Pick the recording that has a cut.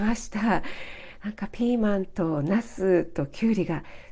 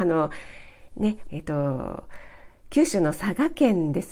second; 1 cut; at 1.3 s

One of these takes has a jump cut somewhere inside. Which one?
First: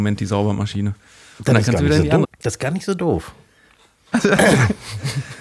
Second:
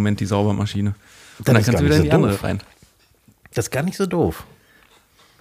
first; 2 cuts; at 2.2 s, 4.1 s

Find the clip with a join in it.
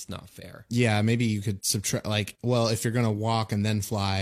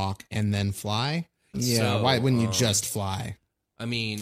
second; 1 cut; at 1.5 s

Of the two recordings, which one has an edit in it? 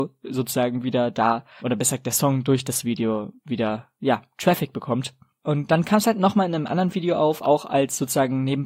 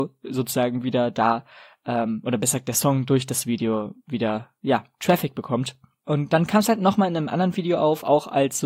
first; 1 cut; at 1.6 s

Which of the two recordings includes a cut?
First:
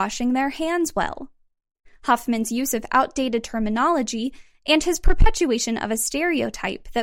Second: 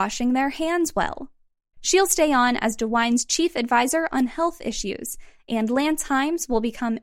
second; 1 cut; at 1.7 s

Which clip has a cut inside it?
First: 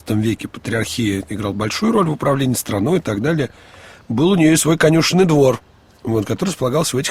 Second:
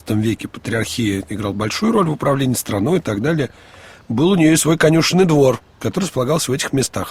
second; 1 cut; at 5.8 s

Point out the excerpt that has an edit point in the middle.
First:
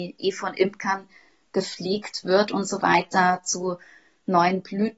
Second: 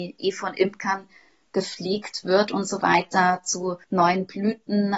second; 1 cut; at 3.8 s

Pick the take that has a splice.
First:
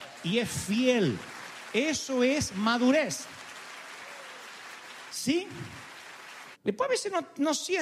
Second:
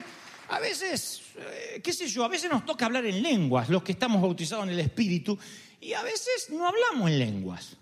first; 1 cut; at 6.5 s

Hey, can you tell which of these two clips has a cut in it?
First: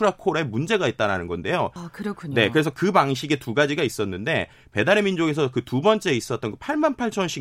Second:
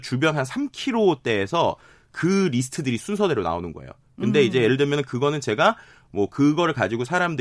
first; 1 cut; at 1.8 s

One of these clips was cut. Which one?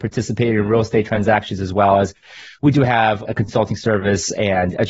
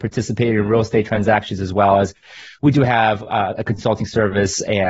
first; 1 cut; at 3.2 s

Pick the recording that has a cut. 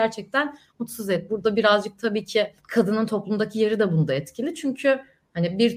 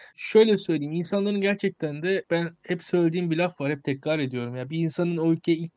first; 2 cuts; at 1.3 s, 2.6 s

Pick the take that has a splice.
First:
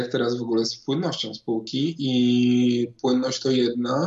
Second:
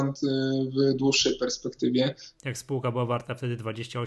second; 1 cut; at 2.3 s

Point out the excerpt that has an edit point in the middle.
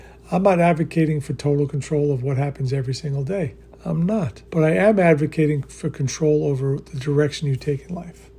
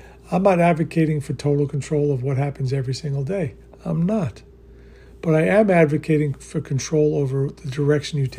first; 1 cut; at 4.5 s

